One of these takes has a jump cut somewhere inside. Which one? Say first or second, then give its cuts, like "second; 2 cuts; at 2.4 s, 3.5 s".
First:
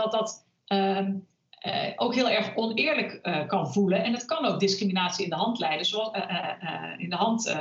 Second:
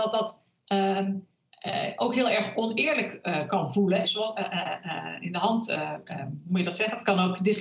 second; 1 cut; at 4.0 s